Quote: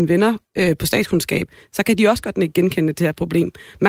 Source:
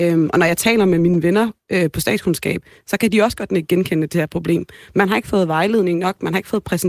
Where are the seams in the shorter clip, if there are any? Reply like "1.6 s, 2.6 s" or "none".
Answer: none